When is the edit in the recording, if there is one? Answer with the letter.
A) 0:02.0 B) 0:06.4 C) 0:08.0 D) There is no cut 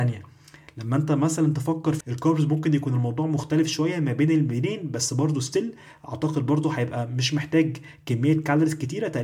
A